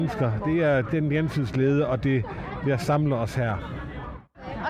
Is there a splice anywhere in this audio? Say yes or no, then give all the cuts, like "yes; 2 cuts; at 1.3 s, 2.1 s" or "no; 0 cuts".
no; 0 cuts